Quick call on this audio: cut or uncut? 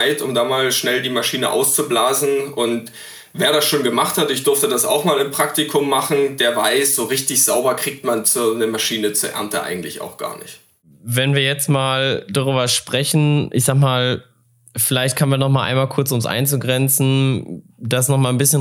uncut